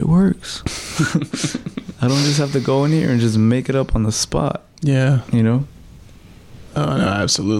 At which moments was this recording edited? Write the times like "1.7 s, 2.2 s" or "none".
none